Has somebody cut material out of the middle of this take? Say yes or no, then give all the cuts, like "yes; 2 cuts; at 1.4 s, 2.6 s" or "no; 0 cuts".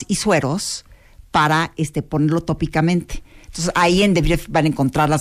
no; 0 cuts